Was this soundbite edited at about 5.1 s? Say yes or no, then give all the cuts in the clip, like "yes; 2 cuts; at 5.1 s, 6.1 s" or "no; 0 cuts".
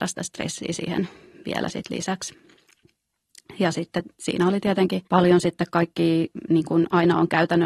yes; 2 cuts; at 3.6 s, 5.1 s